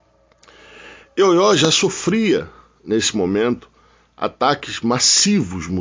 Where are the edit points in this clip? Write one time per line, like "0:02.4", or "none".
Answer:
none